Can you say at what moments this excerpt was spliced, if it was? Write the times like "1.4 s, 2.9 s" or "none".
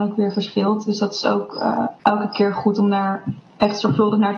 2.0 s